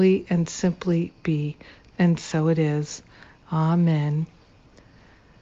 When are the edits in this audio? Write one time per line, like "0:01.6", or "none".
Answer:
none